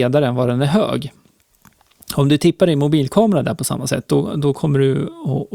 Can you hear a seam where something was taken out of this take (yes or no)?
no